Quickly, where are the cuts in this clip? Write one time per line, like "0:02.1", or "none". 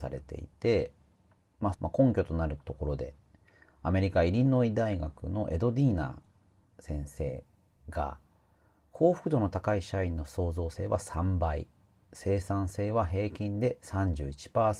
0:01.7